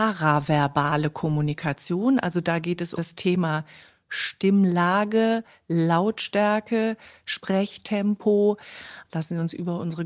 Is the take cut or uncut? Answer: cut